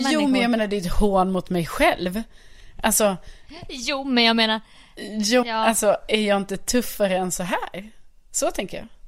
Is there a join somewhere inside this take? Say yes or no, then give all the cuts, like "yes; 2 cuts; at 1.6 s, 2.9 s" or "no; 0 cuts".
yes; 1 cut; at 5.4 s